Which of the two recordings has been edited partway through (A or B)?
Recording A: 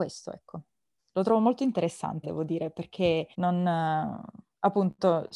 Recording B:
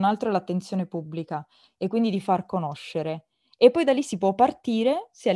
A